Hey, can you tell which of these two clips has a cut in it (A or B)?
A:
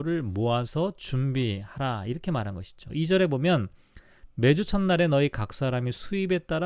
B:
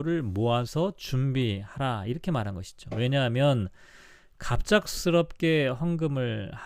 A